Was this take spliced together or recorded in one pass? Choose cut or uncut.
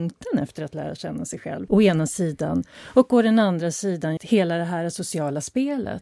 cut